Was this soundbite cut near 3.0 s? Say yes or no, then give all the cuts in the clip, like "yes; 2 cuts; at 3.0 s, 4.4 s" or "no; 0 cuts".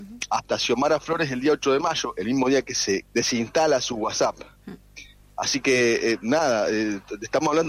yes; 1 cut; at 3.0 s